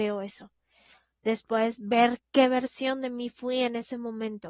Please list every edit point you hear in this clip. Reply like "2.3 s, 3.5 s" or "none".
none